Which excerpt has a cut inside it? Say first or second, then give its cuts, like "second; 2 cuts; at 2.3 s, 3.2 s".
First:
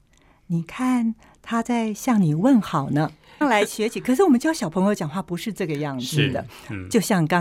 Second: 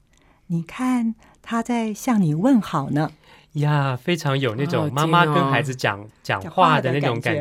first; 1 cut; at 3.4 s